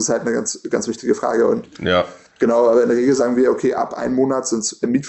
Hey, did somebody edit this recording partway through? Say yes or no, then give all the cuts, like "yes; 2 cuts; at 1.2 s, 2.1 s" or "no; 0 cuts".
no; 0 cuts